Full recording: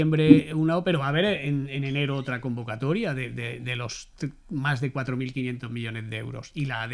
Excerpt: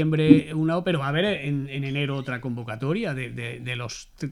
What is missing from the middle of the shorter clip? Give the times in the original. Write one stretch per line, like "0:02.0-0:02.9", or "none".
none